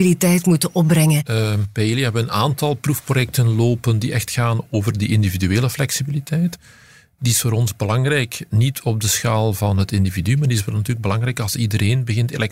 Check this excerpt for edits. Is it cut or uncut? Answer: uncut